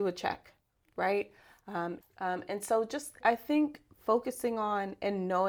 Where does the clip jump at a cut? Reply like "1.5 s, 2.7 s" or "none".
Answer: 2.0 s, 3.2 s